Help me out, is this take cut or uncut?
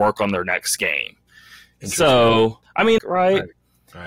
cut